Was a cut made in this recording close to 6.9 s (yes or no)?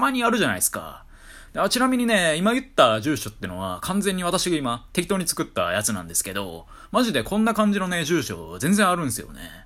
no